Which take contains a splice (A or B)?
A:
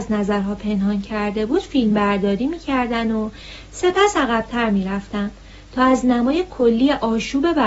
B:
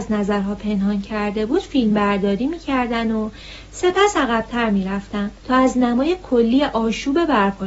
B